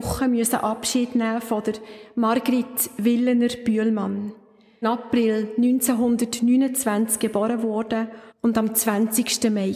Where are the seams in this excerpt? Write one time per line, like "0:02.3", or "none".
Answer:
0:04.8
0:08.3